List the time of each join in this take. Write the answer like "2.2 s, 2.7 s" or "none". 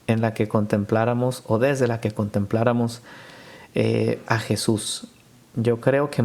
4.3 s